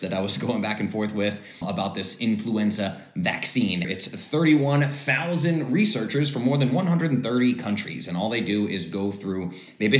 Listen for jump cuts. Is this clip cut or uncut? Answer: cut